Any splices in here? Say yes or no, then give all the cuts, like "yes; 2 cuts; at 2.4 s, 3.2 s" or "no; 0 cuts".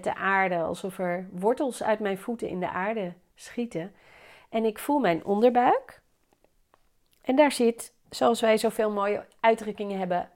yes; 1 cut; at 8.0 s